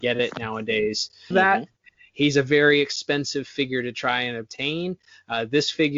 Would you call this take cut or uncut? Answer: cut